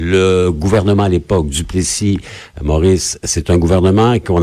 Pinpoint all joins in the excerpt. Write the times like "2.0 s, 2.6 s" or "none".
none